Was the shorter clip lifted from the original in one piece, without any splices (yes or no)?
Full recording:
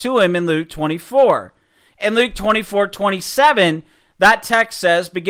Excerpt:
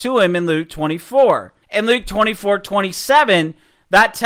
no